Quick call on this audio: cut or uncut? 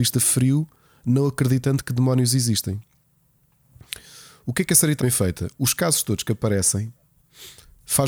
cut